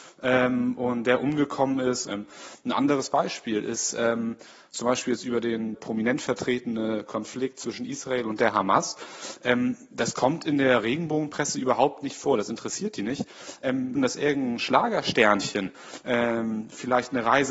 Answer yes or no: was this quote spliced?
yes